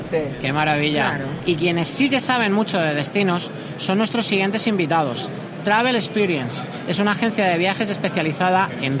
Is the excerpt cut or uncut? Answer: cut